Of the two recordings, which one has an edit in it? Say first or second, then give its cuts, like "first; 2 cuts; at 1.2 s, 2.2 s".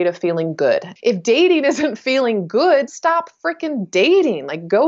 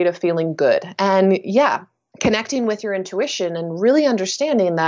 first; 2 cuts; at 1.0 s, 2.9 s